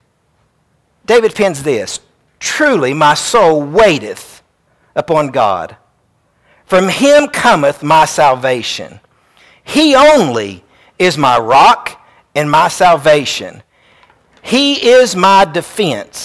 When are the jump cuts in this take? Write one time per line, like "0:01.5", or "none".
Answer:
none